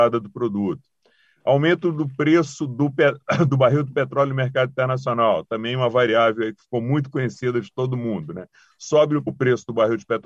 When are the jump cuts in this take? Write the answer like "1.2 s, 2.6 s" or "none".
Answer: 9.3 s